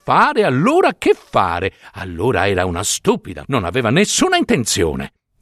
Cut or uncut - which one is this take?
cut